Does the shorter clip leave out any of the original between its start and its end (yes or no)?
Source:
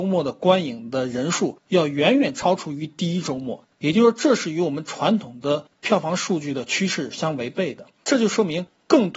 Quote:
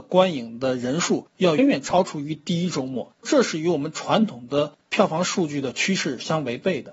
yes